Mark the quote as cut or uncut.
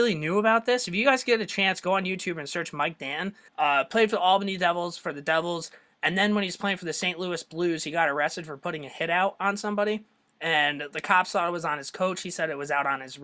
cut